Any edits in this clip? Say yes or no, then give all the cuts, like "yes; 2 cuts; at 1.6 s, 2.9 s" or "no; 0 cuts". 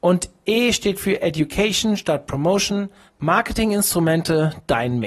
yes; 1 cut; at 3.1 s